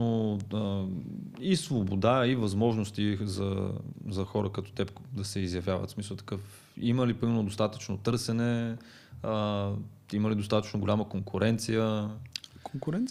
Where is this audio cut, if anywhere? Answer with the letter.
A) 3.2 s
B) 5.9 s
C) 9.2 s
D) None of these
D